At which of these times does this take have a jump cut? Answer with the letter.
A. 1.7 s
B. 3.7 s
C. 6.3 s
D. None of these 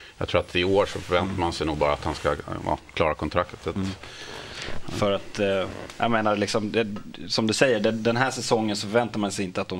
D